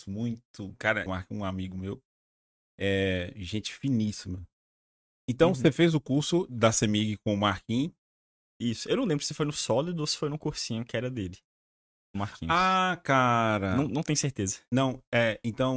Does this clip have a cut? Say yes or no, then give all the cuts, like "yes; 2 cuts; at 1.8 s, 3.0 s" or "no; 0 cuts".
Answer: yes; 1 cut; at 1.1 s